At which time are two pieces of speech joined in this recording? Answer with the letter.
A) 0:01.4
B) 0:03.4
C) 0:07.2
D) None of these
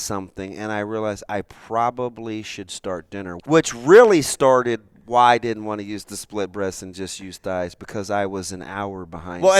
B